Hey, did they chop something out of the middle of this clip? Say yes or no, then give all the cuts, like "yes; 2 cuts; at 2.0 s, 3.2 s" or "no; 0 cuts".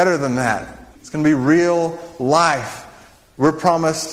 yes; 1 cut; at 1.0 s